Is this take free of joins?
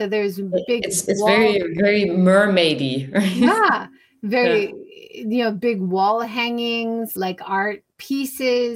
no; 1 cut; at 7.2 s

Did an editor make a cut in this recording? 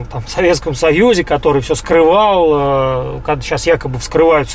no; 0 cuts

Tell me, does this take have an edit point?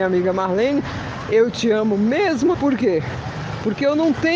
yes; 1 cut; at 2.5 s

